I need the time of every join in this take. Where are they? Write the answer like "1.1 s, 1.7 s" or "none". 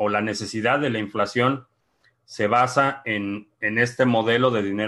none